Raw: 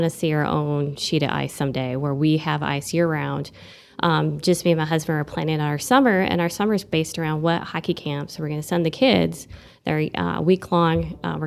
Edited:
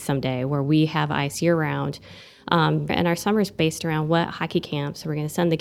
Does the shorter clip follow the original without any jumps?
no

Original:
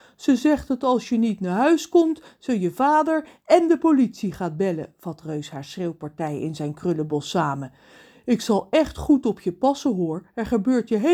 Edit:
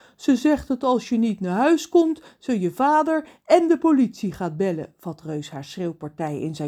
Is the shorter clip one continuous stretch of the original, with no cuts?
yes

